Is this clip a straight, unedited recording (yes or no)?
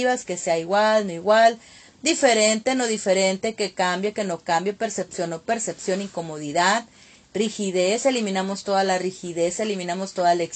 yes